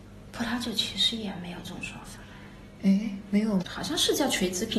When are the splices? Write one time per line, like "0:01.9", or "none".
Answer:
0:03.6